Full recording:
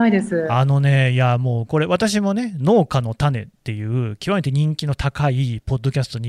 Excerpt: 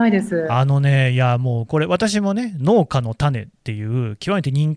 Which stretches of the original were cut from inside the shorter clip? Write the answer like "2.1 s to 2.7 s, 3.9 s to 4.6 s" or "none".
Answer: none